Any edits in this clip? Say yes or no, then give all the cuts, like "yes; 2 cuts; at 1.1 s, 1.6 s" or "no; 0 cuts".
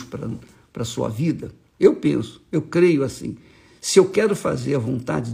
yes; 1 cut; at 1.8 s